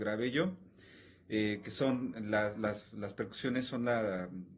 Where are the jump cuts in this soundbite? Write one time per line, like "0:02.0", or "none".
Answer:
none